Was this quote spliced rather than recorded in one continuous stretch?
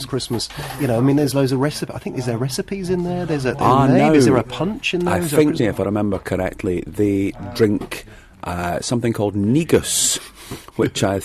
yes; 1 cut; at 5.6 s

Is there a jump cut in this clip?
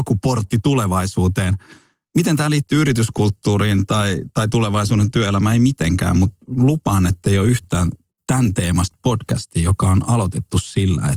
no; 0 cuts

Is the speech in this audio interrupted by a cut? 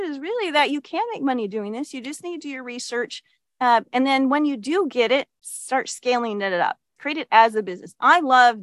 yes; 1 cut; at 7.0 s

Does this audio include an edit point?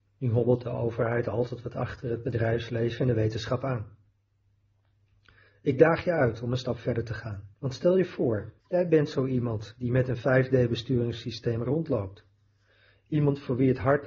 yes; 2 cuts; at 7.5 s, 8.6 s

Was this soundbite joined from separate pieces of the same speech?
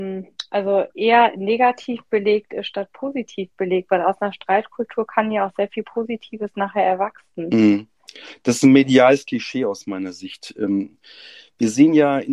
no; 0 cuts

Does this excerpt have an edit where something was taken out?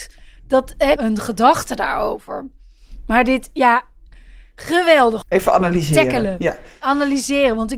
yes; 2 cuts; at 1.0 s, 5.2 s

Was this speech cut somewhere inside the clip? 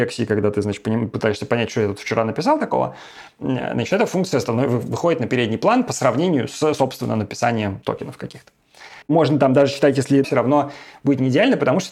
yes; 2 cuts; at 9.0 s, 10.2 s

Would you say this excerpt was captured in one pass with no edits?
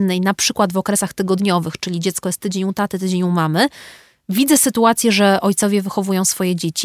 yes; 0 cuts

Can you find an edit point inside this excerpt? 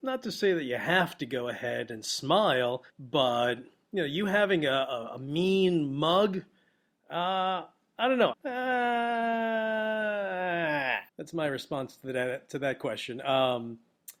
yes; 3 cuts; at 2.9 s, 8.3 s, 11.1 s

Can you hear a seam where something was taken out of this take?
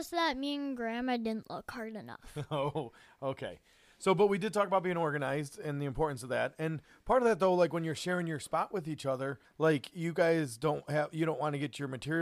yes; 1 cut; at 9.4 s

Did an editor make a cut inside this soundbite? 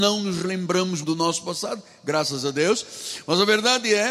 yes; 1 cut; at 1.0 s

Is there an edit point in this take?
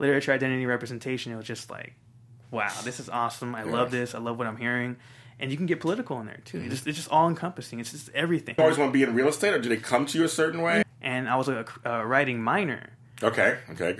yes; 2 cuts; at 8.6 s, 10.8 s

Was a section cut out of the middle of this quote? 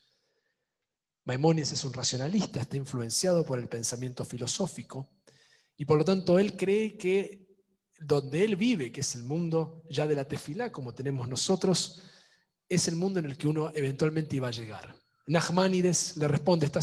no; 0 cuts

